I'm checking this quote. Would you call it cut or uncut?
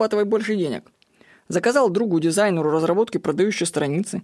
uncut